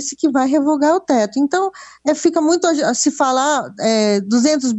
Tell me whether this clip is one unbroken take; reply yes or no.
yes